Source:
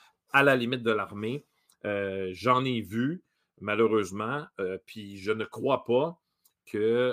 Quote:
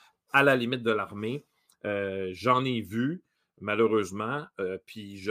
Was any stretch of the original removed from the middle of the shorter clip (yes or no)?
no